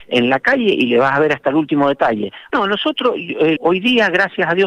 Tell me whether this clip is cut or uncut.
cut